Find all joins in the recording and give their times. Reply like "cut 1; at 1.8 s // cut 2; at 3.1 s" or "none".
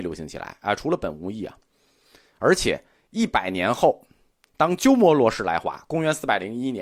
none